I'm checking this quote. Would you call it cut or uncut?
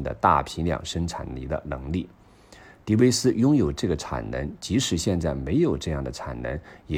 uncut